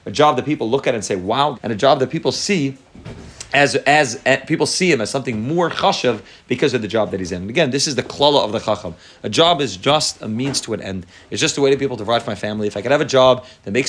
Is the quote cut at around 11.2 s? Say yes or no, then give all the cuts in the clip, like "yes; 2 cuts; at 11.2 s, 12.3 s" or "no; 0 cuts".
no; 1 cut; at 1.5 s